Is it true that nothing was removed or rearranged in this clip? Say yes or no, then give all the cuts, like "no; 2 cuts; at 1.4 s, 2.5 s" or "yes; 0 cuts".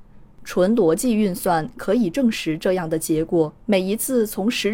no; 1 cut; at 3.6 s